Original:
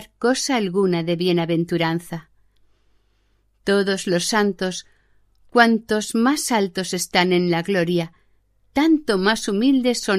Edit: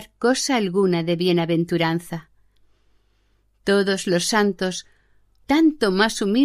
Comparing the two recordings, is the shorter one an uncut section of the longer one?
no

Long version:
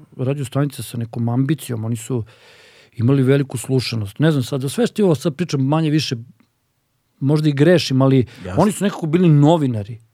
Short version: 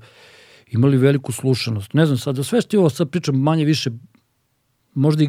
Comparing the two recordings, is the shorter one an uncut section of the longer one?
yes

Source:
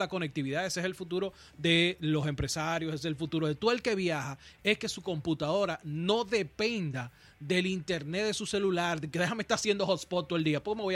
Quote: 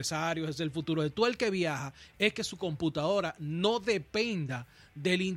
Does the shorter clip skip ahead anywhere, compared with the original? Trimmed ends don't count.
no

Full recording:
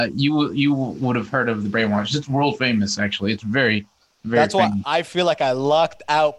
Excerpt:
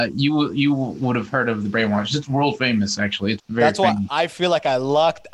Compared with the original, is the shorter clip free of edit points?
no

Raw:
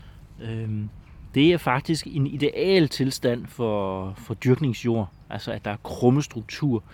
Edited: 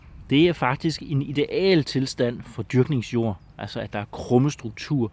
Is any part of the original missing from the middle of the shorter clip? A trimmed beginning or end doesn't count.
yes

